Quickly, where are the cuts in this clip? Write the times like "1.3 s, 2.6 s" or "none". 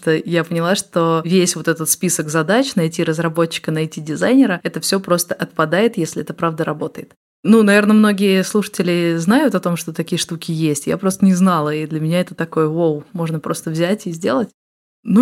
none